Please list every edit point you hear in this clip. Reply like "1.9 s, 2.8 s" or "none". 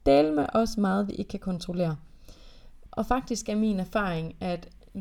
2.9 s